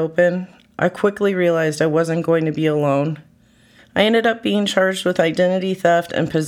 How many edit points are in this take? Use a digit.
1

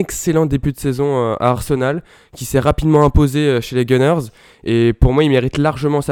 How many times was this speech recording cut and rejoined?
0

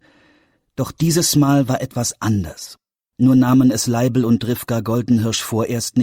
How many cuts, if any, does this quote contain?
0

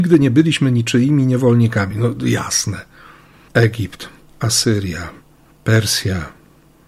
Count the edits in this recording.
0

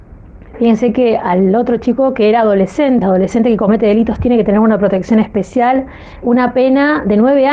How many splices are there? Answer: 2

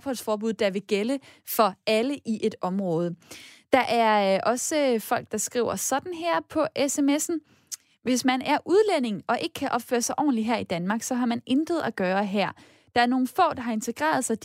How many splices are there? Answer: 0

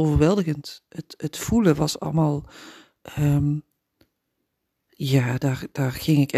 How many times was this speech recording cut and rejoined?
0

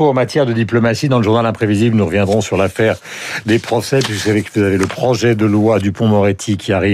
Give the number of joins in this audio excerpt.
0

